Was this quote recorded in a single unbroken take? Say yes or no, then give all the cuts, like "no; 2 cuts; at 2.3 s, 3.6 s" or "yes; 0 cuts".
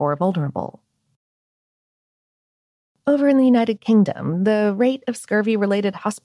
yes; 0 cuts